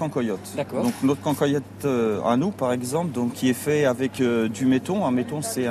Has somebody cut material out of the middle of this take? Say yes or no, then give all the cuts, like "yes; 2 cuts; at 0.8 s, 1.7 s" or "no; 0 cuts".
no; 0 cuts